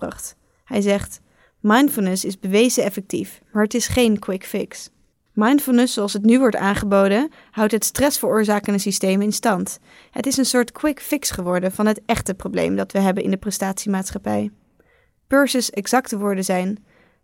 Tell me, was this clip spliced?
no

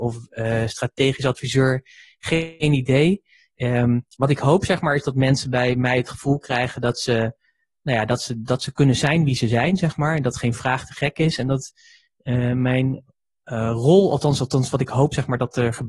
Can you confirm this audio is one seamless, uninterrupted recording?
yes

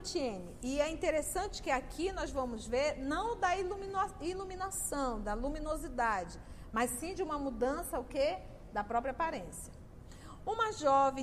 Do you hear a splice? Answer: no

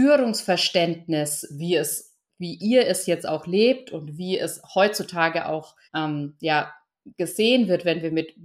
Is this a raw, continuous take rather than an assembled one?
no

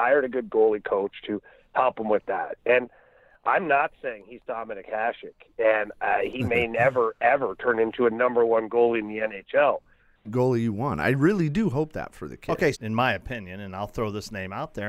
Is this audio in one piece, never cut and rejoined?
no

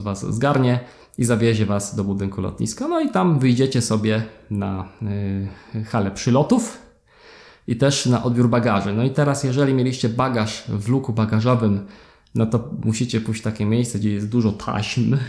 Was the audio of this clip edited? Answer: no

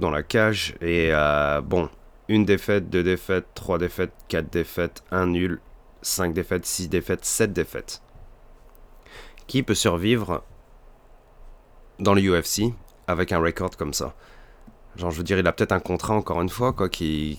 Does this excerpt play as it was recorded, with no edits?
yes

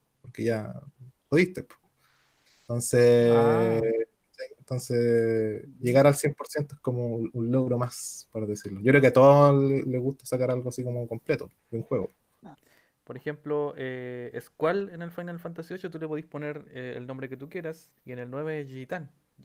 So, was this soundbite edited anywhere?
yes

